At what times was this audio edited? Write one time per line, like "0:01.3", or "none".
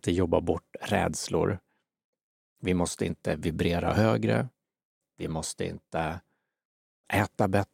none